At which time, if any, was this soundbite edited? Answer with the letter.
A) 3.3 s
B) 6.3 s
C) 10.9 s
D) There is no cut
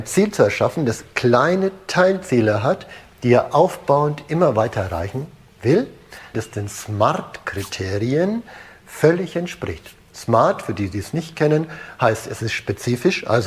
B